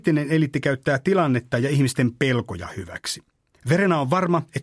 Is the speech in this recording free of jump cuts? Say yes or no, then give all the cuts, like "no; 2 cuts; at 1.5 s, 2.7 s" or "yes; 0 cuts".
yes; 0 cuts